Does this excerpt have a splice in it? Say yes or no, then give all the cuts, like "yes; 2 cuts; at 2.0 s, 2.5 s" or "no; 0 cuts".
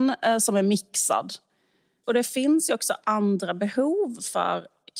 no; 0 cuts